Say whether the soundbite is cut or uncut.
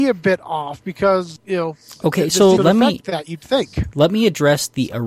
cut